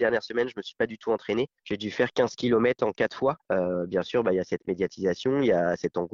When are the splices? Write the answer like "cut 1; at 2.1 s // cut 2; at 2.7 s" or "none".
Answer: cut 1; at 3.4 s